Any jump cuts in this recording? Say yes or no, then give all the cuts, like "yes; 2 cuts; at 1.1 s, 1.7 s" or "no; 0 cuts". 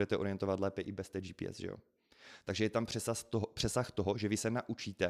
no; 0 cuts